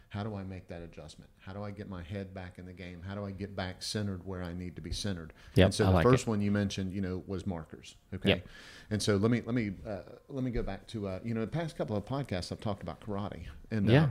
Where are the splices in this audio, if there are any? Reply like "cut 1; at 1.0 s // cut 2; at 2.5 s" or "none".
cut 1; at 5.5 s